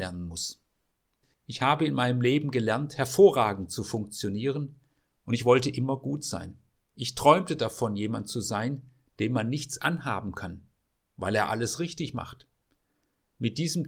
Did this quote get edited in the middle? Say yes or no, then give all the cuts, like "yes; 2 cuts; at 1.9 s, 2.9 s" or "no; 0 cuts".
yes; 1 cut; at 1.3 s